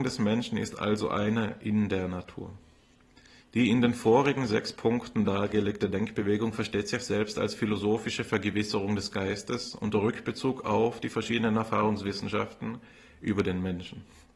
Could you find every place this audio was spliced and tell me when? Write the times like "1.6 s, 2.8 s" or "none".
3.4 s